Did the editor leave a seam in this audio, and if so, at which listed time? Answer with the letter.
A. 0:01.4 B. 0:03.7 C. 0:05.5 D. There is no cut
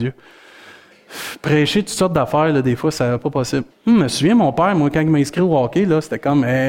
B